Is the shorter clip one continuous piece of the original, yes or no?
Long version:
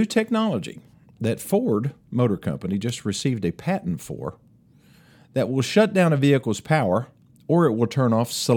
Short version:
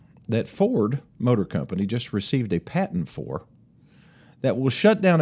yes